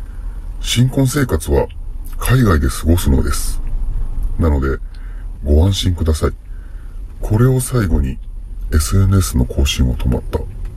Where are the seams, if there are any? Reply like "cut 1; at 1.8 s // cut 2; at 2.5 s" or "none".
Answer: cut 1; at 5.4 s // cut 2; at 7.2 s